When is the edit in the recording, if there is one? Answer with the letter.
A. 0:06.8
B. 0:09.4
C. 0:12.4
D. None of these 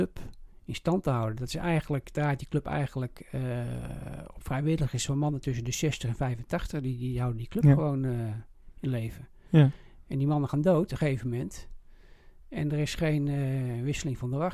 D